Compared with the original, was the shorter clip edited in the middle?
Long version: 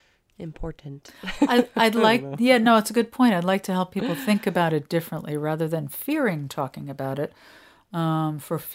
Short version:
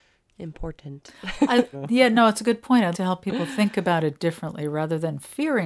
yes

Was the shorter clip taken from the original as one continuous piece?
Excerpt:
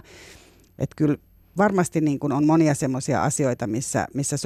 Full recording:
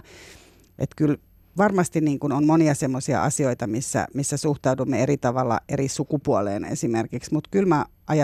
yes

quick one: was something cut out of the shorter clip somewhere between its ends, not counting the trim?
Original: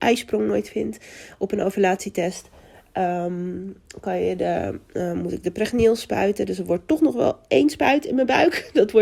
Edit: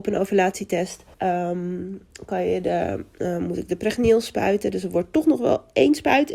yes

